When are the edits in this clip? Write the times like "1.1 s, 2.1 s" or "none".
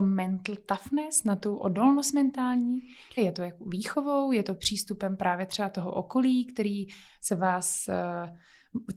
3.2 s